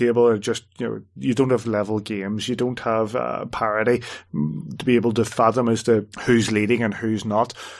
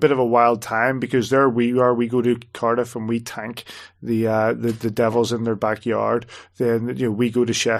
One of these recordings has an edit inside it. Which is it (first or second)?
first